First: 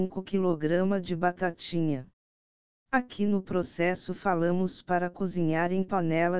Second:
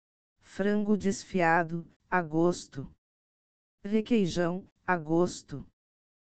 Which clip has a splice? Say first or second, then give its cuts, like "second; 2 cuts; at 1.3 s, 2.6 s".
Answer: first; 1 cut; at 2.8 s